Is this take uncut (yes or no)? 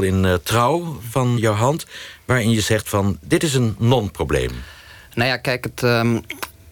no